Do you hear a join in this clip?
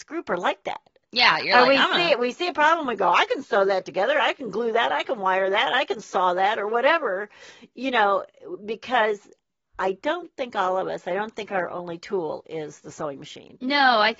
no; 0 cuts

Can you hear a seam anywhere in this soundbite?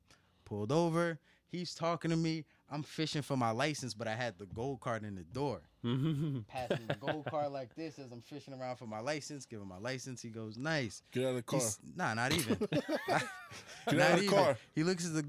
no; 0 cuts

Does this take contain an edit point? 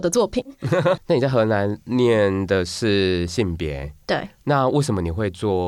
yes; 1 cut; at 1.0 s

